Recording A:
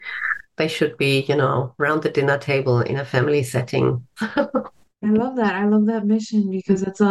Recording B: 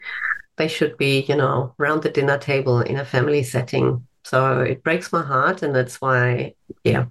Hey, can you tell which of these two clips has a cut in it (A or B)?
A